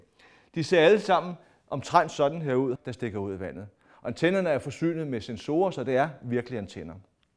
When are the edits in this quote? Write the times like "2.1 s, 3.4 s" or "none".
2.7 s